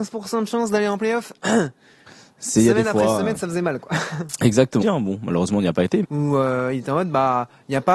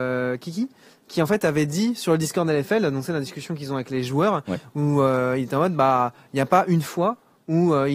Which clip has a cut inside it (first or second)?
first